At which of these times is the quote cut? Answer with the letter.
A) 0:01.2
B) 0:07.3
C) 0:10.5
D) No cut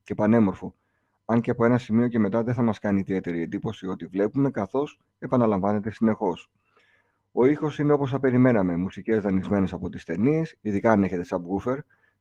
C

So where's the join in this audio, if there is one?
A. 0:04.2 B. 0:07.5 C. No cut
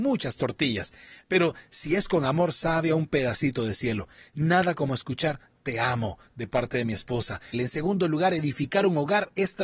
B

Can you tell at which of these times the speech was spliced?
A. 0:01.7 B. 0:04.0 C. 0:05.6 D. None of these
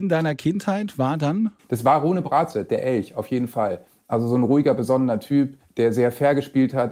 D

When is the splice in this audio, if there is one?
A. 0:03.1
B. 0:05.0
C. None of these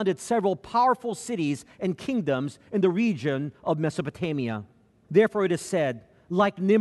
B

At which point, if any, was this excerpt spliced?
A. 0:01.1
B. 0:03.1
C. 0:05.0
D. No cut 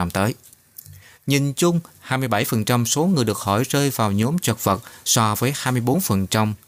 D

